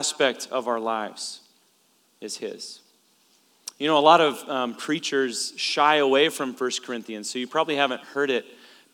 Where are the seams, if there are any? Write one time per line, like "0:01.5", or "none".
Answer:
none